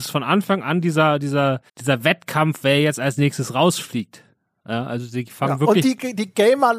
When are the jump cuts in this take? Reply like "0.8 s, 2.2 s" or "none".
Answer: 1.7 s